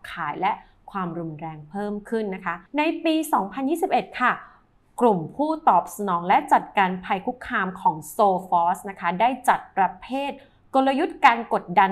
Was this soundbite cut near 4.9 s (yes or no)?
no